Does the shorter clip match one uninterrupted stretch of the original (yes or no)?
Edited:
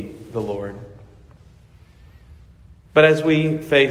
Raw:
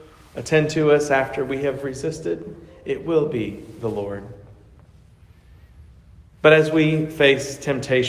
yes